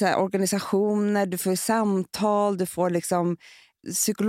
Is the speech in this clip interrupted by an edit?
no; 0 cuts

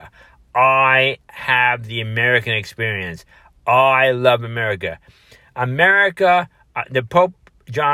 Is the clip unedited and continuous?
yes; 0 cuts

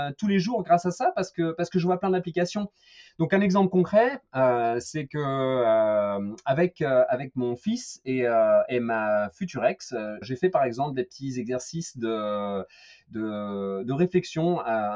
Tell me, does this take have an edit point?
yes; 1 cut; at 10.2 s

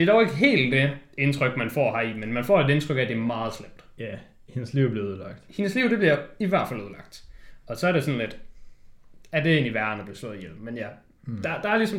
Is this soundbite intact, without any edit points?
yes; 0 cuts

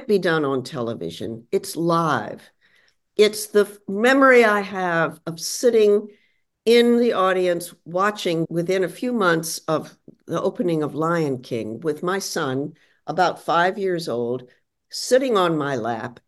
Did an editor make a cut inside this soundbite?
no; 0 cuts

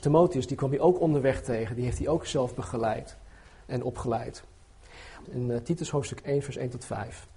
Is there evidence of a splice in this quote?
yes; 2 cuts; at 3.7 s, 5.3 s

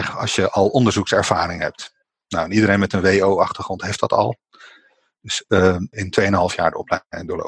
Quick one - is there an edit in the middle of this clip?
yes; 1 cut; at 5.9 s

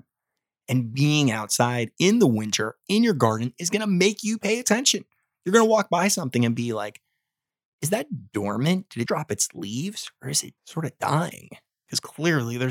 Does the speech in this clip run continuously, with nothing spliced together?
no; 2 cuts; at 9.1 s, 10.6 s

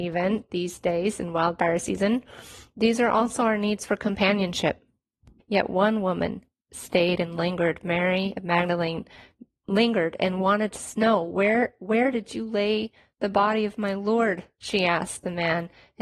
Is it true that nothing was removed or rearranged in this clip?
no; 1 cut; at 5.4 s

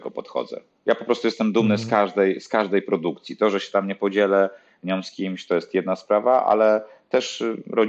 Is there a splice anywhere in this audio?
no; 0 cuts

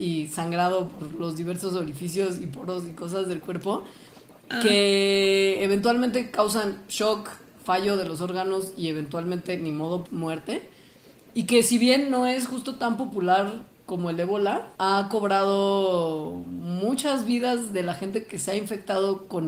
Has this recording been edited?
yes; 2 cuts; at 10.1 s, 14.7 s

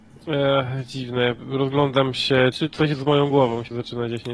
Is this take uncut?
no; 1 cut; at 2.5 s

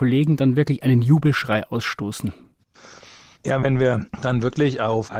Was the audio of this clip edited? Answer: no; 0 cuts

